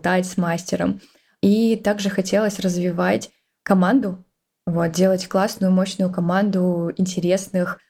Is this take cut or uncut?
uncut